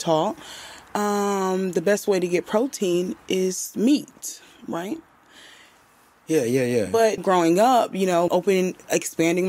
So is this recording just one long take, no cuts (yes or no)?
no